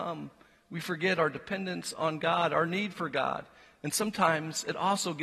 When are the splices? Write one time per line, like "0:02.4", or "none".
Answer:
none